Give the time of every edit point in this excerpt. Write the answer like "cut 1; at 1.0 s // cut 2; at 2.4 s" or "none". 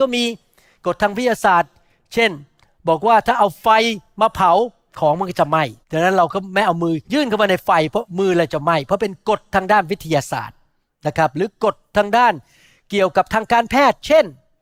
cut 1; at 5.8 s // cut 2; at 7.0 s